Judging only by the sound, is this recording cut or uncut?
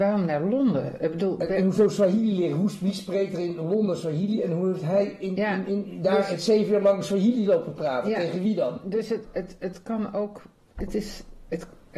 uncut